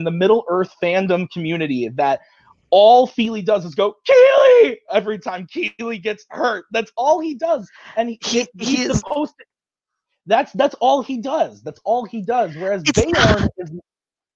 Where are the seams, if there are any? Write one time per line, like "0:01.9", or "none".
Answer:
none